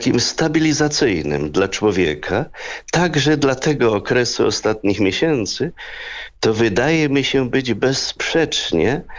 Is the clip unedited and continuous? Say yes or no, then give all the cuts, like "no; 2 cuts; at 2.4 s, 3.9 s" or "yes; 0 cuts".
yes; 0 cuts